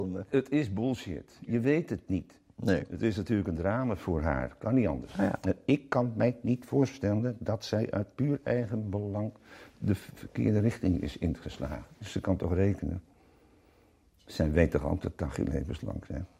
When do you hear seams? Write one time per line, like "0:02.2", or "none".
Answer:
none